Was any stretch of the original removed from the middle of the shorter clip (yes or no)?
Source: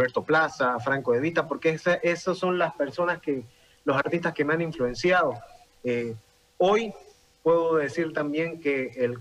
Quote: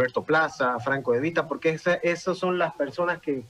no